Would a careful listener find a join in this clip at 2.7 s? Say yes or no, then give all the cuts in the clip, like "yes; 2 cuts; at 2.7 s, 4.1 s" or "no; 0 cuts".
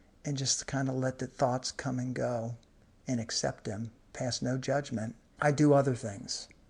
no; 1 cut; at 5.4 s